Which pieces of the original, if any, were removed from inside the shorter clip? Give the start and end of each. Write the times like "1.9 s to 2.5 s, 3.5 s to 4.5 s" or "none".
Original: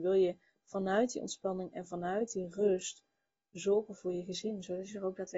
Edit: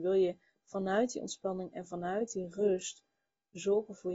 none